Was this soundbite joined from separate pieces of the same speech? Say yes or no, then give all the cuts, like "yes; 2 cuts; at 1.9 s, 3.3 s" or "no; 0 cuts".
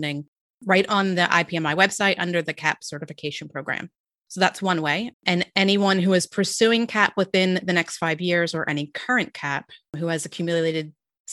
yes; 1 cut; at 5.1 s